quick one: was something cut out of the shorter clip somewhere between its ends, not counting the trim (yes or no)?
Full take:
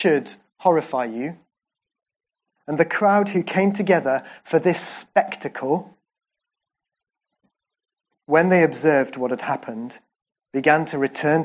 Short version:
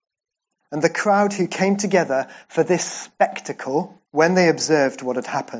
yes